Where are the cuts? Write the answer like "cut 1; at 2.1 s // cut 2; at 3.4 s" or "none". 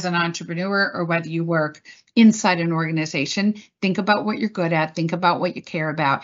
none

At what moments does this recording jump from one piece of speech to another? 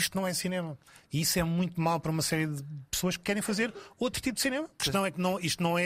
cut 1; at 4.8 s

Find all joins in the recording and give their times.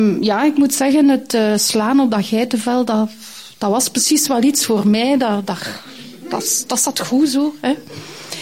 none

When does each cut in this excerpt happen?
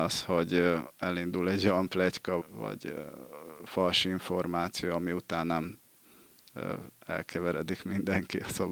cut 1; at 2.4 s

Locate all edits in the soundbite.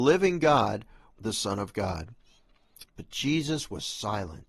cut 1; at 1.1 s // cut 2; at 2.8 s

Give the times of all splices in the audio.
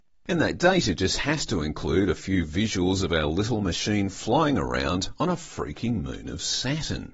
none

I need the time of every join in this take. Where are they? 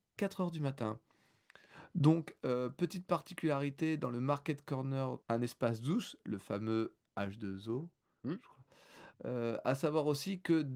cut 1; at 5.2 s // cut 2; at 9.1 s

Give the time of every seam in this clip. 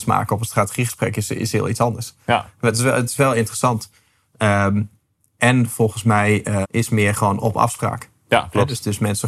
cut 1; at 6.6 s

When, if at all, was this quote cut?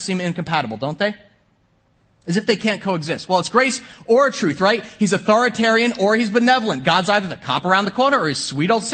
none

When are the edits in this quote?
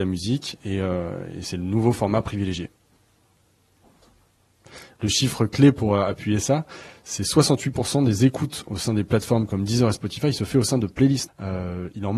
cut 1; at 11.3 s

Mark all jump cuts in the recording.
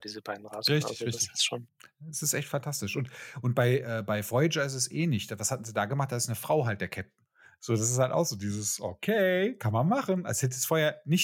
none

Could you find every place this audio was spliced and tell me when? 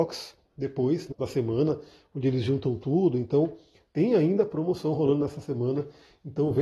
cut 1; at 1.1 s

